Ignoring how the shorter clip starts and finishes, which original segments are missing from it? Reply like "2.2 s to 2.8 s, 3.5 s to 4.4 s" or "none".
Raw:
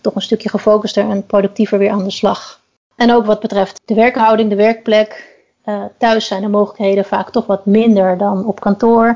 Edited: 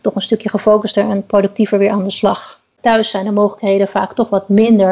2.8 s to 5.9 s